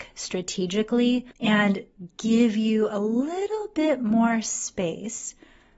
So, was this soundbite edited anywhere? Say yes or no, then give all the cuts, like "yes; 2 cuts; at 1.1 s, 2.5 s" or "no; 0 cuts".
yes; 1 cut; at 1.3 s